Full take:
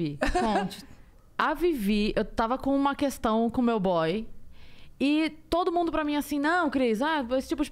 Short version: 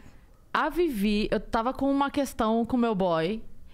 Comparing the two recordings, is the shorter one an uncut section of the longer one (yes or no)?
yes